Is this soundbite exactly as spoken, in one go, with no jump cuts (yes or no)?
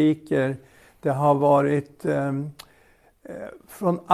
yes